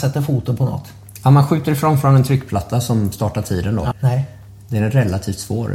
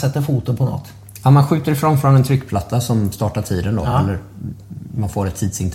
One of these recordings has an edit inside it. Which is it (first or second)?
first